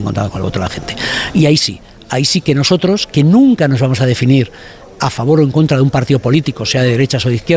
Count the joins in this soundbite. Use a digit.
0